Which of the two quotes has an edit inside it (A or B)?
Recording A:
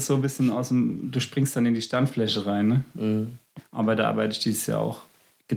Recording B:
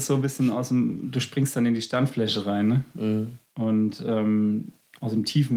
A